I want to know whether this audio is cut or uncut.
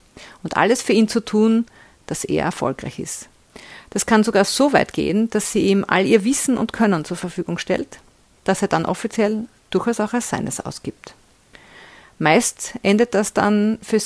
uncut